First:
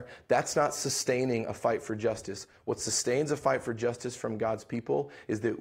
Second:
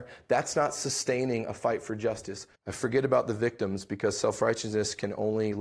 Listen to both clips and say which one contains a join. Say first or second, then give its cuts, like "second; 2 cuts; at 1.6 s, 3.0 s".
second; 1 cut; at 2.5 s